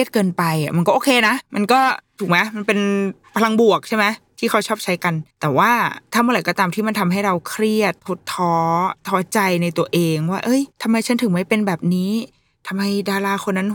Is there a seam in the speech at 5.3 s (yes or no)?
yes